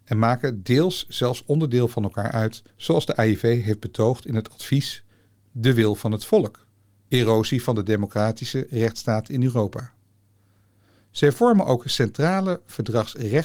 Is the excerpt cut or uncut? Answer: uncut